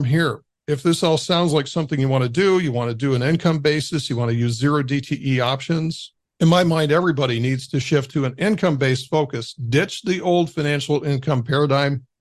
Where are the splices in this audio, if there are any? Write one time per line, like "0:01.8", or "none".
none

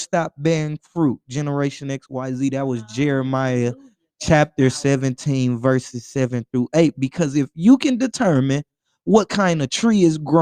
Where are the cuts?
none

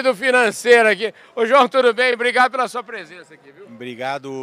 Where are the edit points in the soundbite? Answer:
none

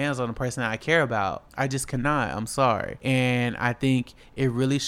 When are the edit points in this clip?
none

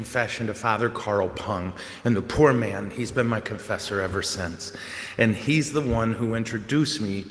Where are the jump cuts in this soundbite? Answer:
none

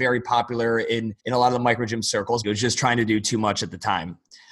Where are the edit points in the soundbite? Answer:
0:01.2
0:02.4

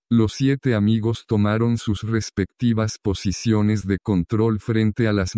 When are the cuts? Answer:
none

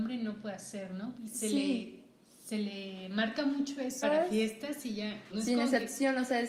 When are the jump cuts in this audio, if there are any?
0:01.2
0:04.0
0:05.3

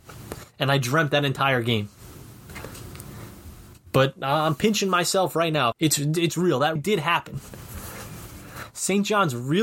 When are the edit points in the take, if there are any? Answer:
0:05.7
0:06.8

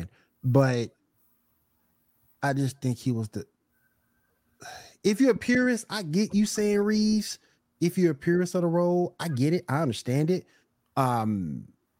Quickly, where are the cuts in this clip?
none

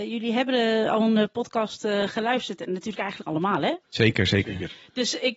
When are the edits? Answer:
0:03.8

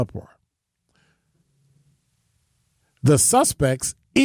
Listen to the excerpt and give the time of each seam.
none

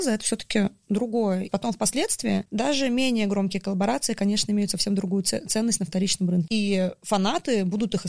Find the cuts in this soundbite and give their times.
0:01.5
0:06.5

